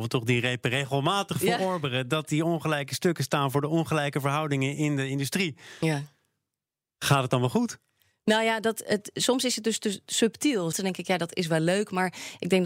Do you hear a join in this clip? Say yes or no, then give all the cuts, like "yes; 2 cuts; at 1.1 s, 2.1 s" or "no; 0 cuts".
yes; 1 cut; at 10.7 s